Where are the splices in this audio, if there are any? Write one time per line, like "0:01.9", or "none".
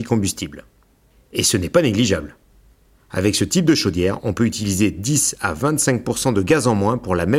none